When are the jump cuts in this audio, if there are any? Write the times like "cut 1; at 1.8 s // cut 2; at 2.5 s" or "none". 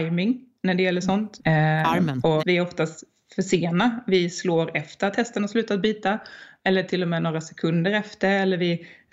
cut 1; at 1.4 s // cut 2; at 2.4 s